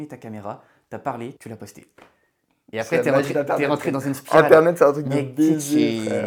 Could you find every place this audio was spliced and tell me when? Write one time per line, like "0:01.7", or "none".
0:01.4

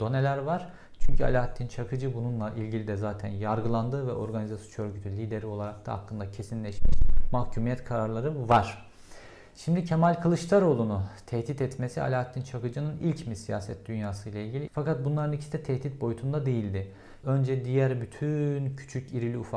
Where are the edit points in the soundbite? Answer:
0:14.7
0:17.2

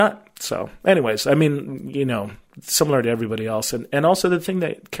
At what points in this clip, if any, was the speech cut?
none

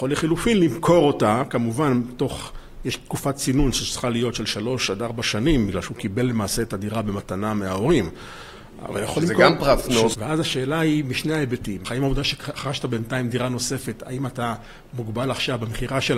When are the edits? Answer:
0:10.1
0:11.8

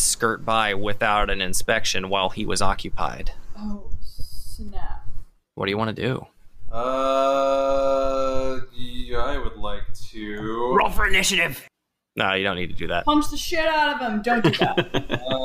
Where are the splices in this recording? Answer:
none

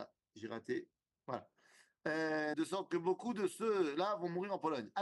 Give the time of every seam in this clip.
0:01.1
0:02.5

